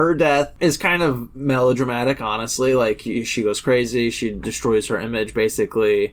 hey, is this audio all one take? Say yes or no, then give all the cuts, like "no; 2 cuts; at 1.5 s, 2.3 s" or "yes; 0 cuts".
yes; 0 cuts